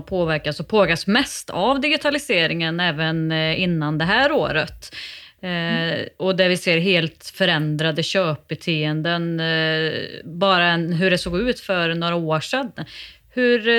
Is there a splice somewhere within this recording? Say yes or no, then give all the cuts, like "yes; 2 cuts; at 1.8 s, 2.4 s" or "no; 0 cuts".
no; 0 cuts